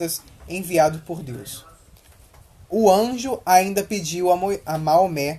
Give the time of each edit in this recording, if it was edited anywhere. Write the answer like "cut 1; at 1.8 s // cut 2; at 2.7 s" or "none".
none